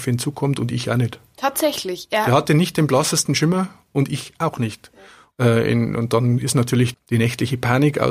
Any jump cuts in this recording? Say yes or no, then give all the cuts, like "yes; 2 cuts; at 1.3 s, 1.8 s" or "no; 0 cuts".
yes; 2 cuts; at 5.3 s, 6.9 s